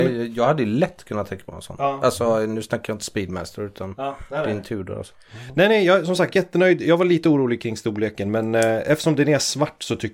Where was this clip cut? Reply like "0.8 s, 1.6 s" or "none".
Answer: none